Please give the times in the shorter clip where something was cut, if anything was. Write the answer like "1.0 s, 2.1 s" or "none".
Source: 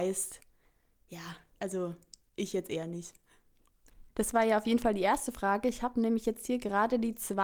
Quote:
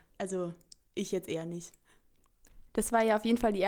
none